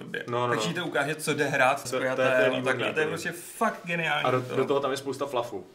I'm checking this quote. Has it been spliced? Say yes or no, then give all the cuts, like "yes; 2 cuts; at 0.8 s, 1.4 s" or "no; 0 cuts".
yes; 1 cut; at 1.8 s